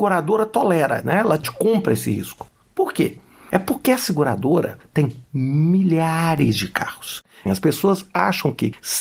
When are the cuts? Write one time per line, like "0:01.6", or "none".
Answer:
0:07.5